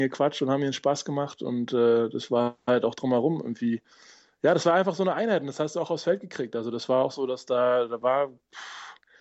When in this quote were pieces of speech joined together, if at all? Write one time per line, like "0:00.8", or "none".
none